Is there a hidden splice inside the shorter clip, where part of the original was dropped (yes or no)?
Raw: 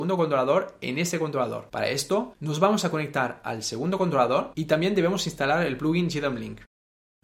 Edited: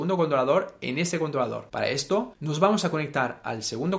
no